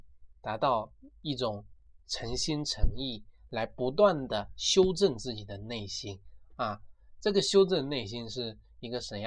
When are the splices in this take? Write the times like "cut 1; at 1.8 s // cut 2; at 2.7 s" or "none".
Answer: cut 1; at 3.5 s